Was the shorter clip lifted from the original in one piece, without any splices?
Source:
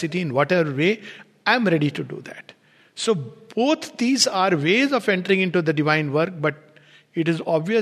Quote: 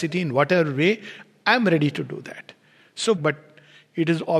no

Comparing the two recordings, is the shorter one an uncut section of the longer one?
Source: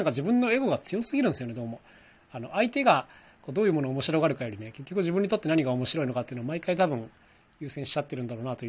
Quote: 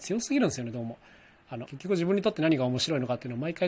no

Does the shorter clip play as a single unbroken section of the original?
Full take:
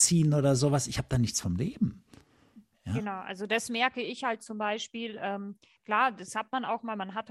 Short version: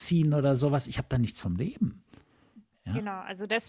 yes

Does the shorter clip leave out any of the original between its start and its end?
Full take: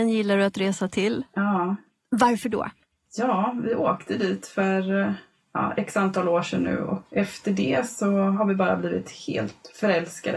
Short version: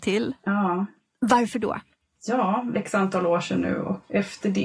yes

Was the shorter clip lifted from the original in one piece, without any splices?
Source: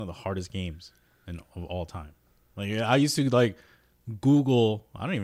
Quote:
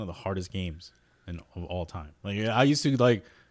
no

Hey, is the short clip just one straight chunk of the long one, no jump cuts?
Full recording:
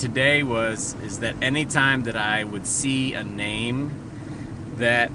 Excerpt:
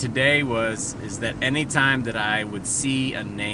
yes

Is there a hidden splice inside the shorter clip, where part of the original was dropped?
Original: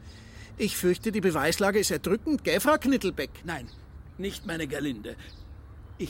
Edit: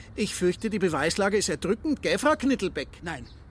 no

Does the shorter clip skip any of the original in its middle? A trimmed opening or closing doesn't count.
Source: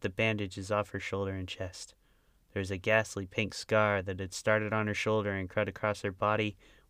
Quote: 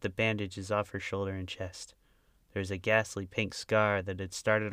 no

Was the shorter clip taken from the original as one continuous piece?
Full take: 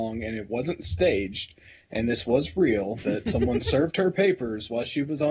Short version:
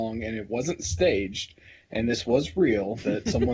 yes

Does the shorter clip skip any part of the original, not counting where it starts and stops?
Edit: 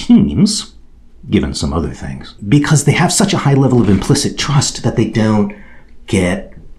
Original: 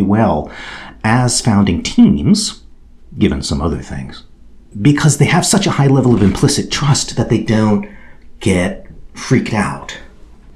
yes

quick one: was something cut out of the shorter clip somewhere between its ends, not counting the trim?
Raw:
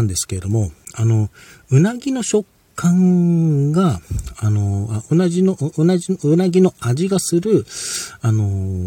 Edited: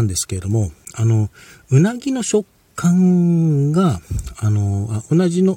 no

